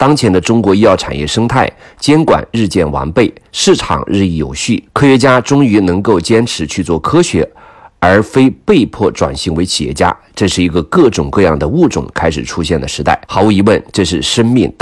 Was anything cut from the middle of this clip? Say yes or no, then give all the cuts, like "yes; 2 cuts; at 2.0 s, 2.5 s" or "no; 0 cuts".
yes; 2 cuts; at 4.9 s, 13.2 s